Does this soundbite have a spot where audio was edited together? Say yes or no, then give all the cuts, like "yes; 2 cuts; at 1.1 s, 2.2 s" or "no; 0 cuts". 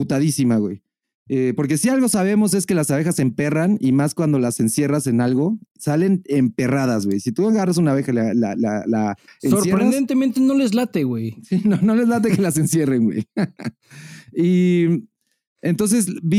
no; 0 cuts